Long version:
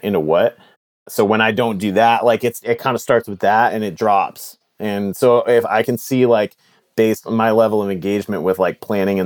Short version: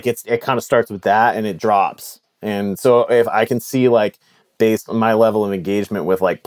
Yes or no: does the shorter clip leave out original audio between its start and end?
no